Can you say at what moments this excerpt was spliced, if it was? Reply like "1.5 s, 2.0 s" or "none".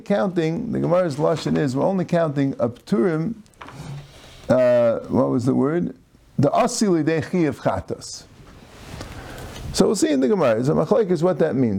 none